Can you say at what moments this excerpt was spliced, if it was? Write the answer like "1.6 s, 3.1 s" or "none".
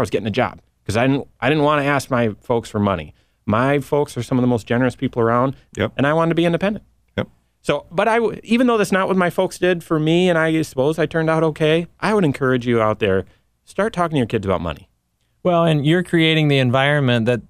5.7 s